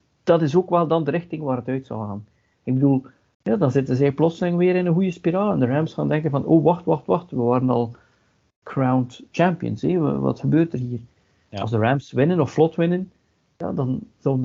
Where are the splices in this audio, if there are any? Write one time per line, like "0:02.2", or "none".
0:03.3